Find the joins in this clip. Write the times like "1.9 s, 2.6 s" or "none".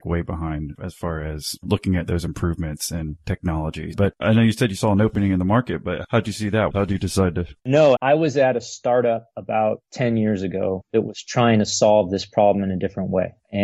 3.9 s, 6.7 s, 8.0 s